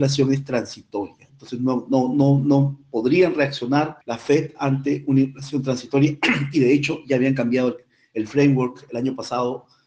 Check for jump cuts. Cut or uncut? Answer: cut